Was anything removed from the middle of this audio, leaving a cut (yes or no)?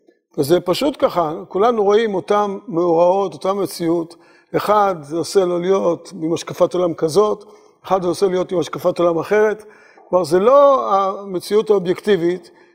no